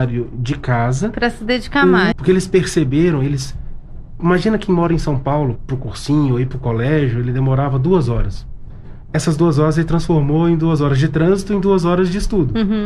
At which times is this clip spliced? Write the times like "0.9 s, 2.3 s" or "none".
2.1 s, 5.6 s